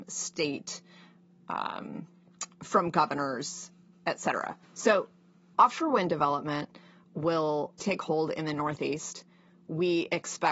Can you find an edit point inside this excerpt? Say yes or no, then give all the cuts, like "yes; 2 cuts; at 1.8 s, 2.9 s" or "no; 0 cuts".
yes; 2 cuts; at 4.6 s, 7.8 s